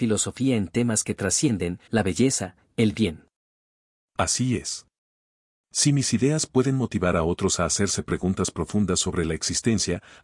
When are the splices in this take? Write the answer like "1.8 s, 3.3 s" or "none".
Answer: 1.9 s